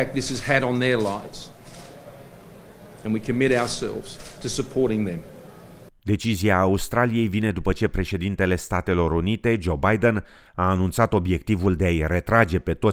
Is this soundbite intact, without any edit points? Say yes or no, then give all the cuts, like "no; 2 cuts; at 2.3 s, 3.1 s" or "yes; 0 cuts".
no; 1 cut; at 5.9 s